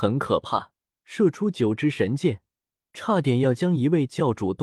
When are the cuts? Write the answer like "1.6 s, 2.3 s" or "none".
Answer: 1.0 s